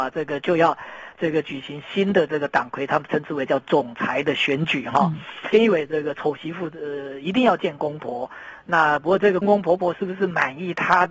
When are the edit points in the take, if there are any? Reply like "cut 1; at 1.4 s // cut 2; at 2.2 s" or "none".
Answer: cut 1; at 9.4 s